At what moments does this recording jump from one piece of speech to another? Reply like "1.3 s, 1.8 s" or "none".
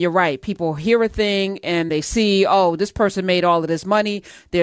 1.9 s